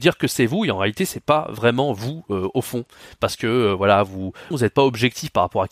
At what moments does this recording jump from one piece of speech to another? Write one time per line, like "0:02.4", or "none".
0:04.5